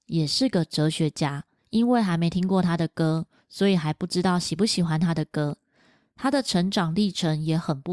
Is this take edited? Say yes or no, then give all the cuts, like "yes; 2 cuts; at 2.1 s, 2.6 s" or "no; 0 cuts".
no; 0 cuts